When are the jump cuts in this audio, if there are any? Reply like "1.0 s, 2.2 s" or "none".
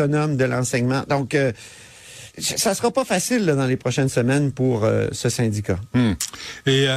2.3 s